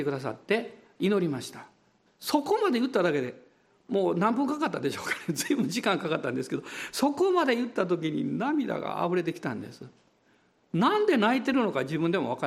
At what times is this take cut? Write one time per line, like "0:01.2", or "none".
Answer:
0:02.1